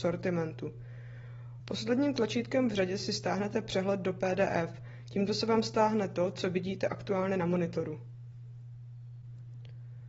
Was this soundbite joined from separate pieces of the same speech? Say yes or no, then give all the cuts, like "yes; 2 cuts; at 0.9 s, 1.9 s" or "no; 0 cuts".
yes; 1 cut; at 1.6 s